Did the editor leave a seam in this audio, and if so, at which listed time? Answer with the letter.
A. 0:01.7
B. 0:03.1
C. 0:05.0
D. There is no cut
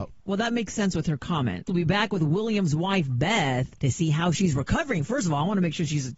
A